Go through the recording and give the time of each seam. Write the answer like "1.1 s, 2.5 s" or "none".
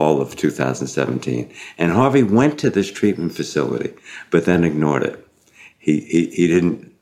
none